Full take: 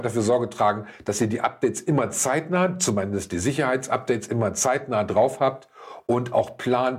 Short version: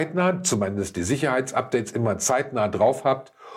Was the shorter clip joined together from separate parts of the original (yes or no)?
no